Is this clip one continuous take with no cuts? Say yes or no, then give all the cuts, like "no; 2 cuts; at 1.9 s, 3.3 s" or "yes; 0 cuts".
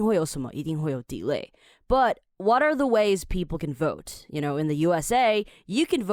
yes; 0 cuts